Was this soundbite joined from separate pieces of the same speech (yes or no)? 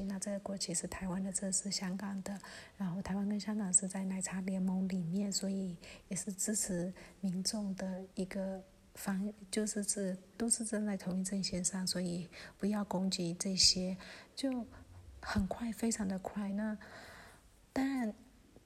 no